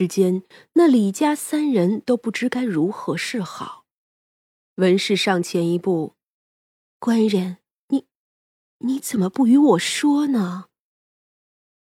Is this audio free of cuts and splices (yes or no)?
yes